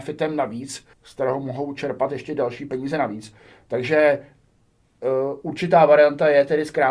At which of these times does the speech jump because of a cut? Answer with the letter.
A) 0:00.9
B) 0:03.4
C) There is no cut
A